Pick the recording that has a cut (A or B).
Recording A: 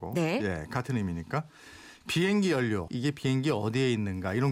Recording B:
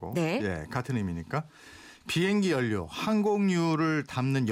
A